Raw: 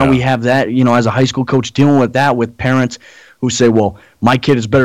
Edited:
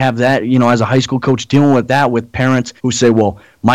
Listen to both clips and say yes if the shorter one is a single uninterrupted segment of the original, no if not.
no